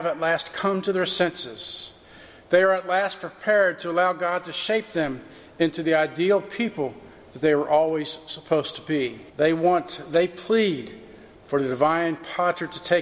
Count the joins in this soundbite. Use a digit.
1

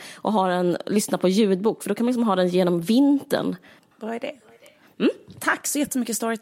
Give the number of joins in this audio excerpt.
1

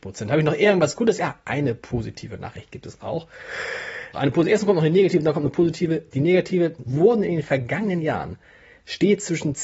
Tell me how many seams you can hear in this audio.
2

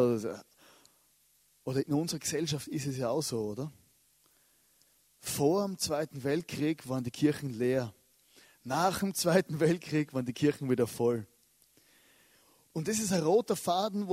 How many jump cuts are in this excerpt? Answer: 0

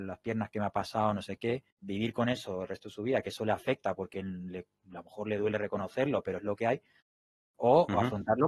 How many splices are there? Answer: 1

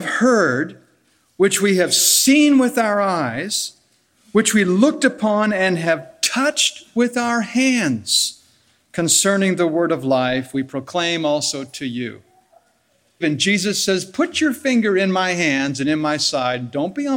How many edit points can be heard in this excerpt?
1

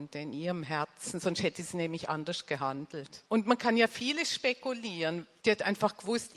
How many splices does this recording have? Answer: 2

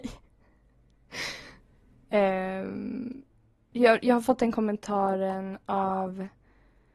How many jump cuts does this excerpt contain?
1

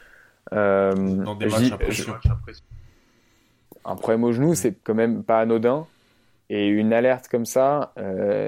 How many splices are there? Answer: 1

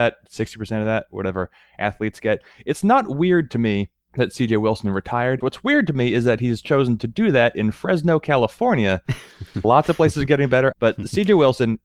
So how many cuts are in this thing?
3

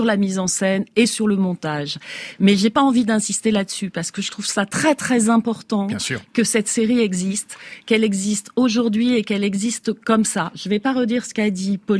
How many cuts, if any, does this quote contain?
0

